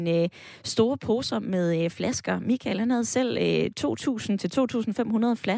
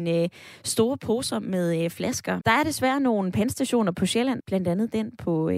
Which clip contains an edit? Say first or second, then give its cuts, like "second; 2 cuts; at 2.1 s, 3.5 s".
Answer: second; 2 cuts; at 2.4 s, 4.4 s